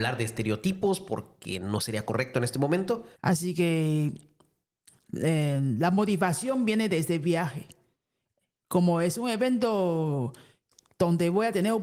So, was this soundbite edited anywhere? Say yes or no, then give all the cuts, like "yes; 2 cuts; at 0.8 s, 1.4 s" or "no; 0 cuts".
yes; 1 cut; at 3.2 s